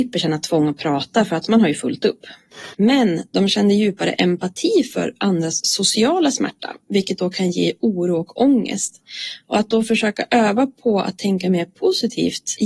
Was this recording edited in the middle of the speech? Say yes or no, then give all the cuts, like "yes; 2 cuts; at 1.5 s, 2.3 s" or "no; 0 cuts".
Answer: yes; 1 cut; at 2.7 s